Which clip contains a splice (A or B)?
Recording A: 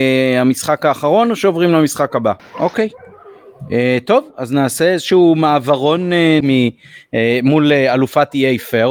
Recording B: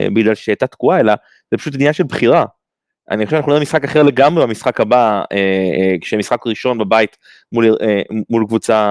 A